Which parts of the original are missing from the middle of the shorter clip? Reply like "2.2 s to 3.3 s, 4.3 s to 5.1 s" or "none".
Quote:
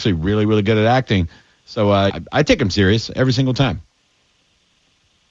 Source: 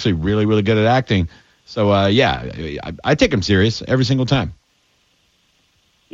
2.1 s to 2.8 s